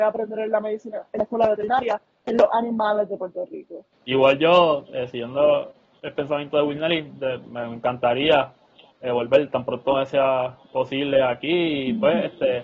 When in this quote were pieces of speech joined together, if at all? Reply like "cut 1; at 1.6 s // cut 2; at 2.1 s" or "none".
cut 1; at 3.9 s